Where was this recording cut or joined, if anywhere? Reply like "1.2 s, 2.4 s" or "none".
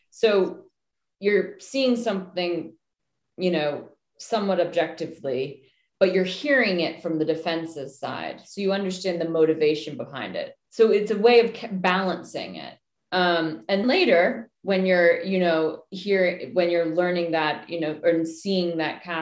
10.6 s, 13.8 s